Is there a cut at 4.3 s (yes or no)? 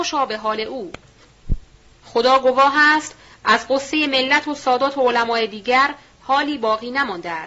no